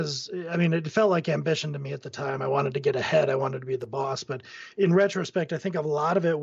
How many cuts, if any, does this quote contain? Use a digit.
0